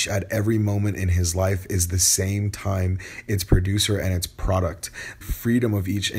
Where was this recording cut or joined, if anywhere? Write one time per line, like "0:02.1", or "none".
0:05.2

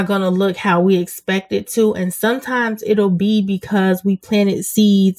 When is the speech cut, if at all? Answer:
none

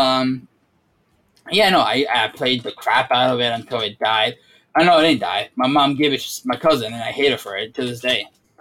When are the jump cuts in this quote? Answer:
none

